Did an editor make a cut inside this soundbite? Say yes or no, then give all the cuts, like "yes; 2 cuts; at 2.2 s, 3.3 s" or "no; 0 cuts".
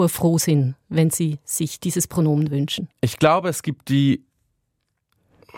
yes; 1 cut; at 2.9 s